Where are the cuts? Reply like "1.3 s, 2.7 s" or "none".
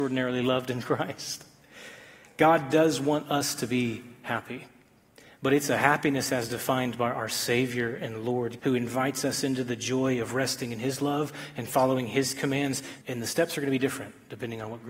8.6 s, 13.0 s